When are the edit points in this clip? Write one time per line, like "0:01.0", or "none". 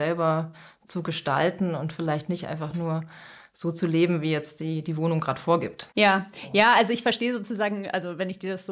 0:05.9